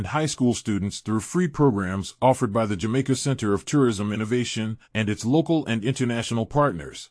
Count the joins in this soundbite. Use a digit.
1